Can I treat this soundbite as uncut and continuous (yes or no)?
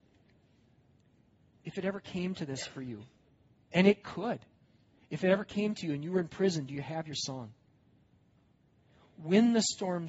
yes